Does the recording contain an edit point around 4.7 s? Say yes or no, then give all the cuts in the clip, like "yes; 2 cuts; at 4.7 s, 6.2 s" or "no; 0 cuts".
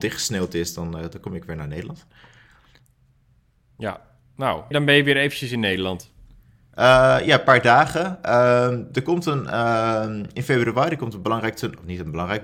yes; 1 cut; at 4.7 s